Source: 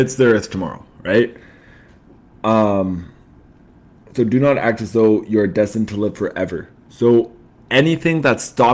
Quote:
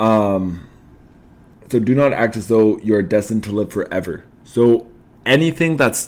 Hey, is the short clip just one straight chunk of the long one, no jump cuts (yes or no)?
yes